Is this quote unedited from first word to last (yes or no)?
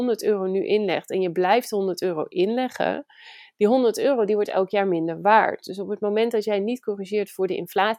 yes